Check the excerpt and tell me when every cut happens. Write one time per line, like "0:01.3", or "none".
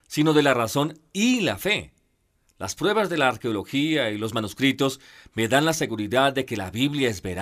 none